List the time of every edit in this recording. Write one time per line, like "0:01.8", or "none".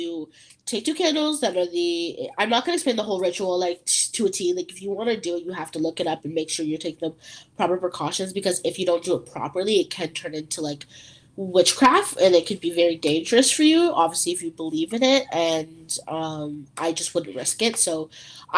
none

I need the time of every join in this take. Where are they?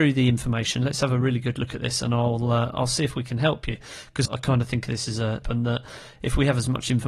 0:04.3
0:05.4

